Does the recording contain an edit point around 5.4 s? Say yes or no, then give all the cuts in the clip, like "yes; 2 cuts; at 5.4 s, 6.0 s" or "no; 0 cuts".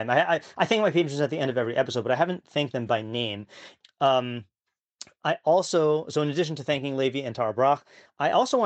no; 1 cut; at 3.8 s